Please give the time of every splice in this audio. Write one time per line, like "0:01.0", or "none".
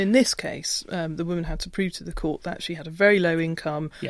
none

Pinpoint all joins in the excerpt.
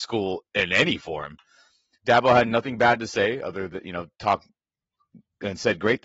0:02.0

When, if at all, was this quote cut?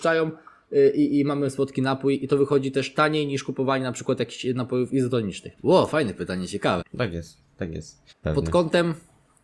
0:05.6
0:06.8
0:08.1

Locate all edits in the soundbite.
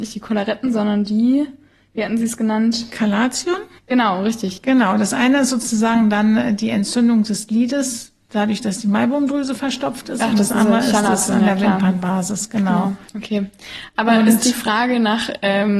none

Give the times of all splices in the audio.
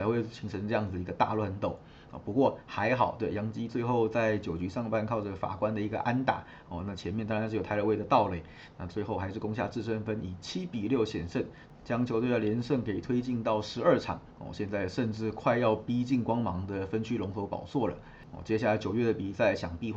none

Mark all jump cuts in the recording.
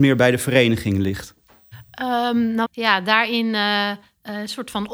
0:02.7

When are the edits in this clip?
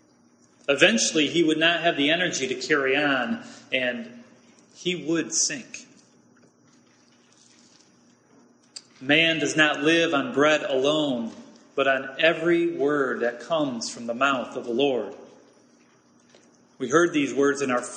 none

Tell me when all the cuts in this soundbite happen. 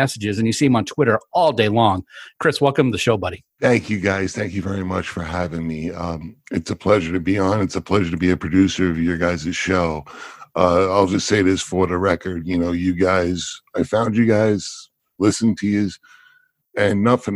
none

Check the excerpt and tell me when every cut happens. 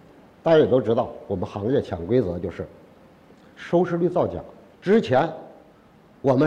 0:04.7

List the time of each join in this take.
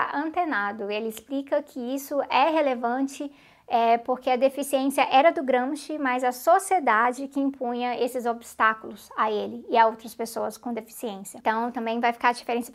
none

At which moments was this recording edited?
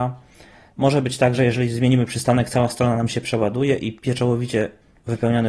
none

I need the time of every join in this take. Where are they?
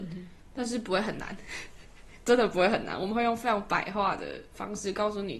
none

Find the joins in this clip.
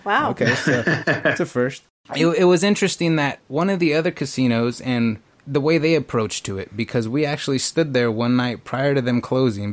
none

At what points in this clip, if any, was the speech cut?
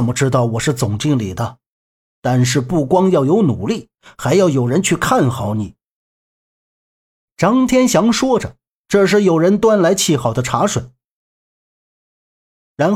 0:02.0

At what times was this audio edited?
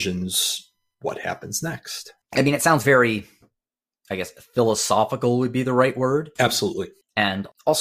none

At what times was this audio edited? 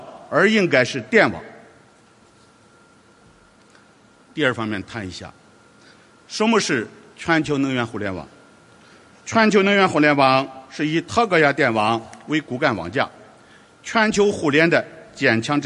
none

